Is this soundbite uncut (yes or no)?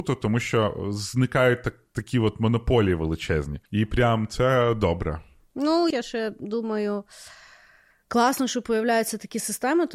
no